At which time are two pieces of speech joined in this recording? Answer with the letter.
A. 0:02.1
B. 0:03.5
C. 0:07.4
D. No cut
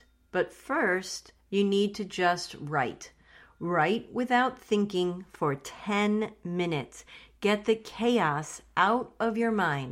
D